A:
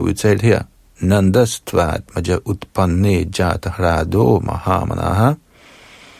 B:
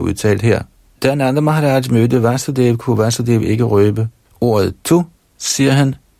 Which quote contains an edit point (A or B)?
B